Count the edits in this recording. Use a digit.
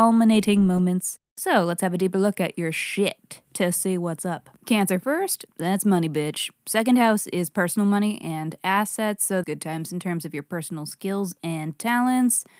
2